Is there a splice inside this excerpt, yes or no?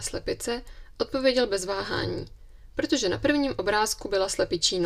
no